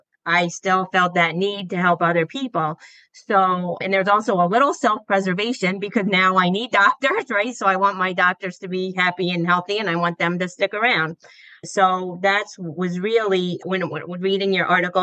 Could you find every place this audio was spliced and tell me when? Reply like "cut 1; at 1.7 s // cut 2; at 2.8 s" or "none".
none